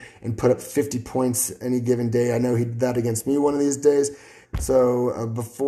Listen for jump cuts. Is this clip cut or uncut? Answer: cut